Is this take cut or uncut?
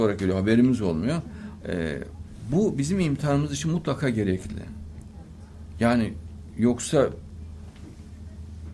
cut